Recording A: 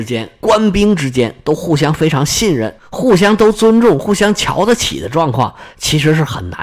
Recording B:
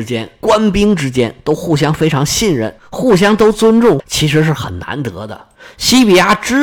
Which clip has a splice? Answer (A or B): B